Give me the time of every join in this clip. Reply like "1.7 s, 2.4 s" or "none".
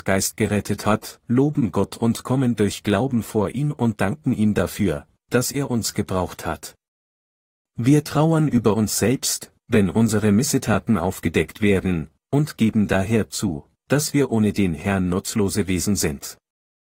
none